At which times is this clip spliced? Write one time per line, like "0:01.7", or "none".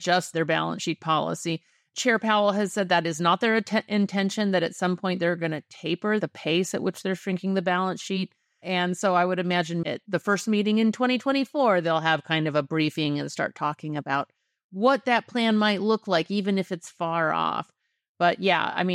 0:09.8